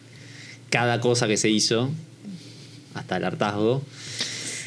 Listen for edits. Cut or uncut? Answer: uncut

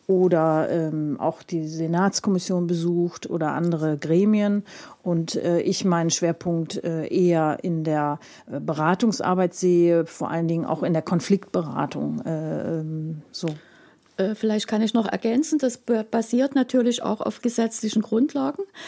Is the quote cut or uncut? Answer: cut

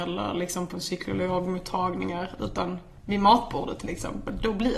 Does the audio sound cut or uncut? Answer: uncut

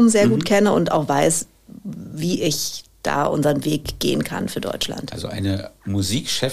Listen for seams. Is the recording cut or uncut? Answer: uncut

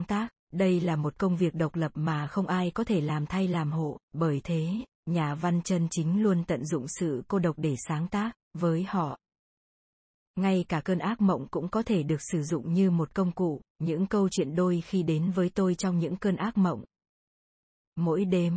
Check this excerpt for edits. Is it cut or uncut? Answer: cut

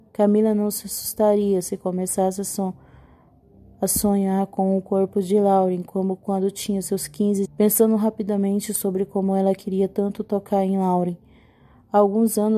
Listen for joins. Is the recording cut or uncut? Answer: cut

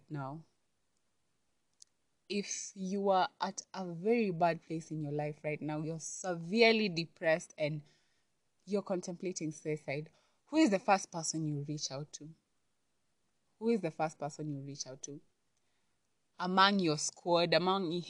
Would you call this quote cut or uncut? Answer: uncut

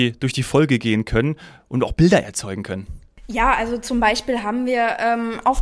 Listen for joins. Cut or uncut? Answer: uncut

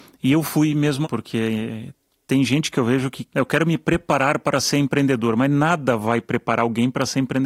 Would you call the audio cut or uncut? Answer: cut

